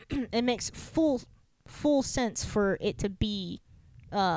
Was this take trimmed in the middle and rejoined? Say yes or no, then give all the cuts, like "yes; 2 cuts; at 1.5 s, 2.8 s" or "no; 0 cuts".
no; 0 cuts